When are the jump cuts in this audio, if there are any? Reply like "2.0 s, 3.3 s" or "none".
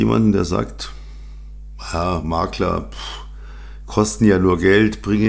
none